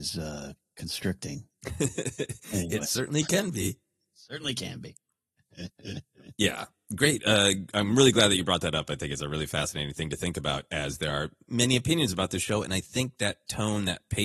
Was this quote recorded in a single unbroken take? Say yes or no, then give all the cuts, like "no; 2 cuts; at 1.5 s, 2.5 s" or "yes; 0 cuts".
yes; 0 cuts